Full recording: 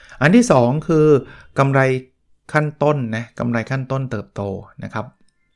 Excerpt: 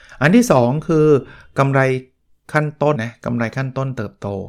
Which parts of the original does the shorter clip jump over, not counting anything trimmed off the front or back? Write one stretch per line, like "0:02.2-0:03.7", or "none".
0:03.0-0:03.1